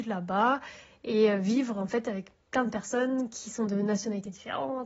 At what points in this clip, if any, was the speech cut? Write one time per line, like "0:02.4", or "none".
none